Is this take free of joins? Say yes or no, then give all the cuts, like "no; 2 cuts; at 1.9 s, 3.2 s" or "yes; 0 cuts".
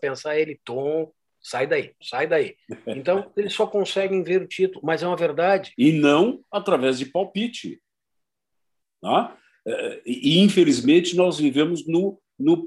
no; 2 cuts; at 2.0 s, 5.8 s